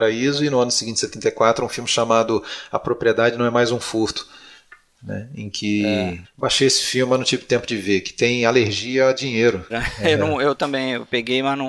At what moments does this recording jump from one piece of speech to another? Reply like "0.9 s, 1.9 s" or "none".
6.2 s, 9.7 s